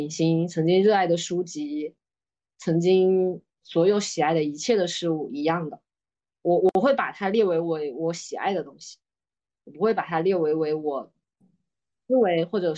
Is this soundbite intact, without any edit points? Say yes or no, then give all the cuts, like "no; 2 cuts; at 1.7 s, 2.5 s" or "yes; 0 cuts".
yes; 0 cuts